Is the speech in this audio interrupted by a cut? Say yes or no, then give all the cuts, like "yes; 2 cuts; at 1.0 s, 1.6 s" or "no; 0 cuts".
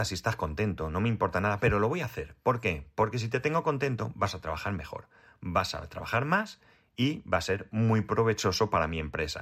no; 0 cuts